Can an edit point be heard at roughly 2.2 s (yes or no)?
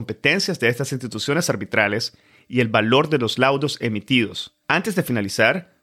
no